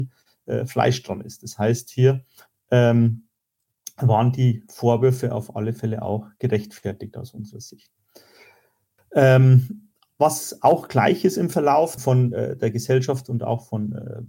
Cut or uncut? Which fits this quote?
cut